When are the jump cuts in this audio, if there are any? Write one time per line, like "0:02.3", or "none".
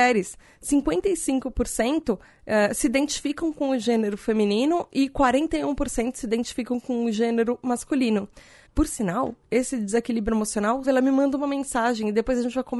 0:08.7
0:10.8